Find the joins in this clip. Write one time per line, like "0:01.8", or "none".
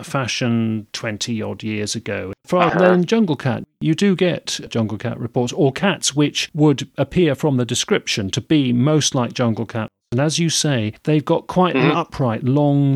0:02.7